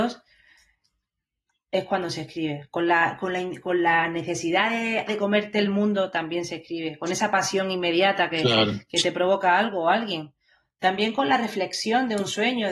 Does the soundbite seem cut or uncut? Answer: cut